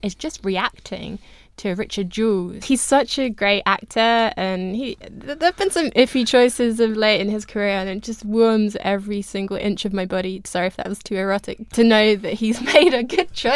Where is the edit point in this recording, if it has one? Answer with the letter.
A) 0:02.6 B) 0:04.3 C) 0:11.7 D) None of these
A